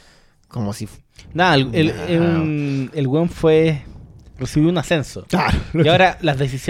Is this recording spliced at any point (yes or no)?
no